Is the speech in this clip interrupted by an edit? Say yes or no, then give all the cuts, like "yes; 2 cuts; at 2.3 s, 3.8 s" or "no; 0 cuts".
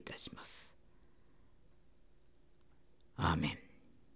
no; 0 cuts